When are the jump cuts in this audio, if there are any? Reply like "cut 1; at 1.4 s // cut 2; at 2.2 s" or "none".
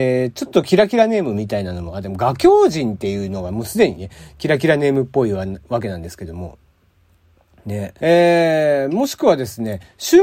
cut 1; at 8.0 s